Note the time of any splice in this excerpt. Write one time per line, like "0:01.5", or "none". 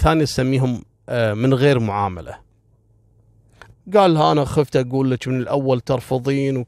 0:03.7